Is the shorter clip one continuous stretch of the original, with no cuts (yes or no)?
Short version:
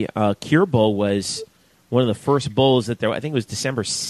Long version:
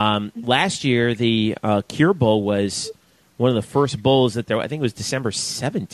yes